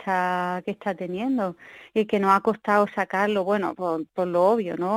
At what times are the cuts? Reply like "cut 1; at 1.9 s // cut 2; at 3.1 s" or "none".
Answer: cut 1; at 1.9 s // cut 2; at 3.8 s